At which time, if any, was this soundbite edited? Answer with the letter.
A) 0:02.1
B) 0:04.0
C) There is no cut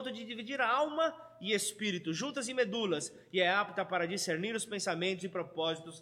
C